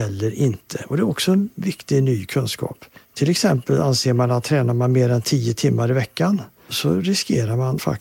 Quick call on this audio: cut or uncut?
uncut